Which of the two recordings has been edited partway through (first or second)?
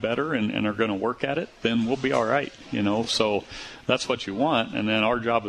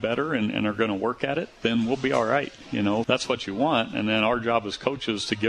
second